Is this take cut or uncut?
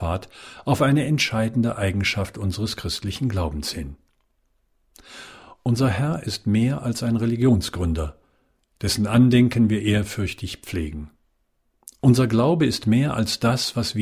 uncut